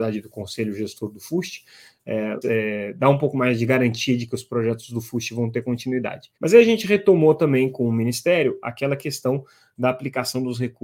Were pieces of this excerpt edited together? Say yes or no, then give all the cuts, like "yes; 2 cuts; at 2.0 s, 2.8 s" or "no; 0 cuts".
yes; 2 cuts; at 2.4 s, 6.4 s